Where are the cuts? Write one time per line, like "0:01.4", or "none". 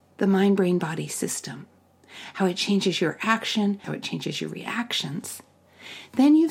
0:03.8